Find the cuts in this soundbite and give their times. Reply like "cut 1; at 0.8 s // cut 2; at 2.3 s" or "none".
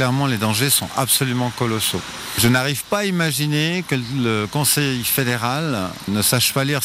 none